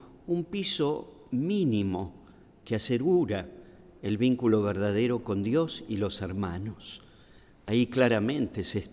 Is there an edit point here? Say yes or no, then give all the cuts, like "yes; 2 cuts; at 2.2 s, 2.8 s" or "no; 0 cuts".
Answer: no; 0 cuts